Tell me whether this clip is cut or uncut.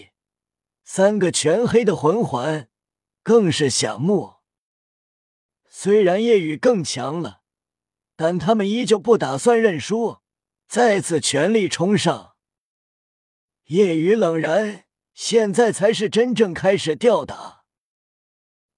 uncut